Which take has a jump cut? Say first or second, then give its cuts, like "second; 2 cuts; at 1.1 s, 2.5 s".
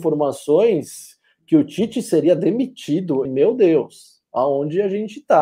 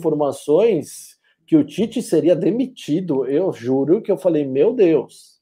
first; 1 cut; at 3.3 s